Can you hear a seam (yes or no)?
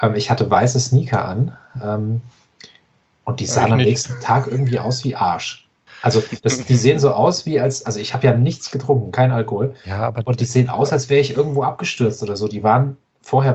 no